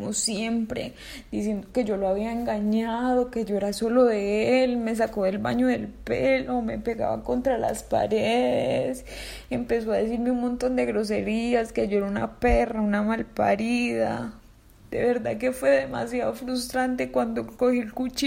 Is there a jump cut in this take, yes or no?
no